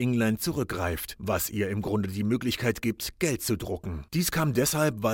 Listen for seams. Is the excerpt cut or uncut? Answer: cut